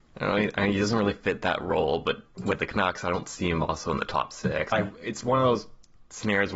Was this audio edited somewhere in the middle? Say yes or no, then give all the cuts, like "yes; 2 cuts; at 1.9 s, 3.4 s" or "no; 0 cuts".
yes; 1 cut; at 4.7 s